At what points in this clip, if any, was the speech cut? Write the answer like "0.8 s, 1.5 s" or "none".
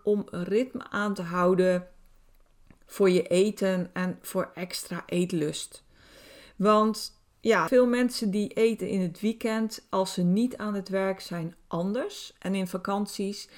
7.7 s